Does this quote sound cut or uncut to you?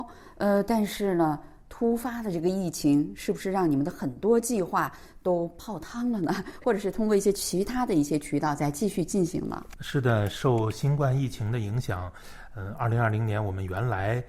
uncut